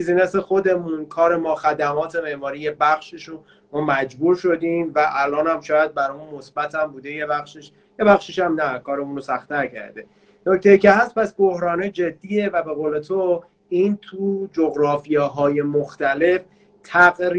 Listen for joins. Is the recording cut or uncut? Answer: uncut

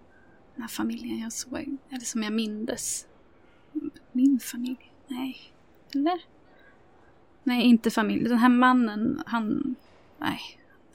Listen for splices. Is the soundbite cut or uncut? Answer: uncut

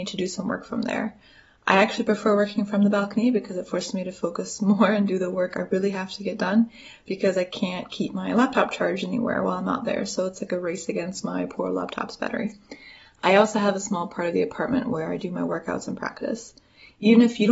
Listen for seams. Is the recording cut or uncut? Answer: uncut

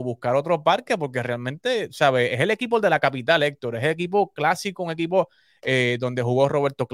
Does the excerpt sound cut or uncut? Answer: uncut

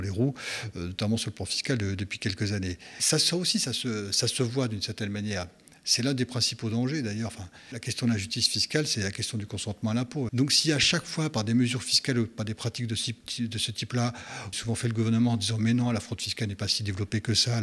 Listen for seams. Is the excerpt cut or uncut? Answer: cut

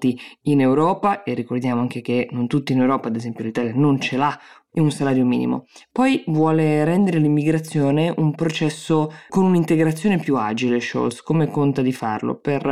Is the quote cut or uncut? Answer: cut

